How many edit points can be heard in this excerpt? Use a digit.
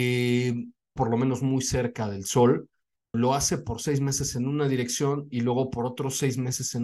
2